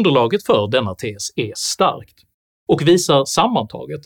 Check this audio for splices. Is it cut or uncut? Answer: uncut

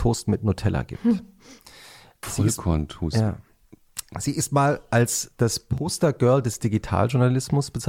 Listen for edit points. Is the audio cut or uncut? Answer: uncut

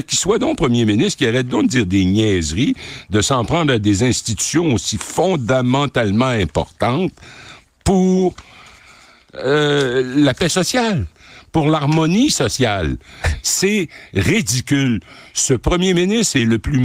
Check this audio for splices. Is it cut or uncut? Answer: cut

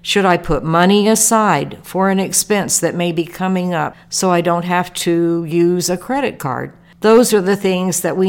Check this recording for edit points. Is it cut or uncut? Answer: uncut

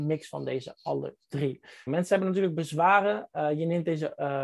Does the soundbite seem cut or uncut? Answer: cut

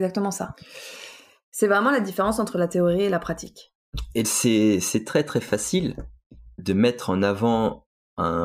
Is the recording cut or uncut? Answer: cut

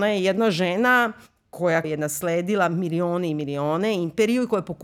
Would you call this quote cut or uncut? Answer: cut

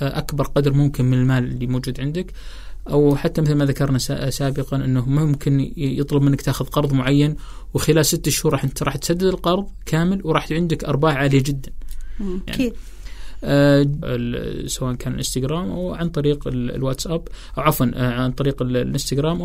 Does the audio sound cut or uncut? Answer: cut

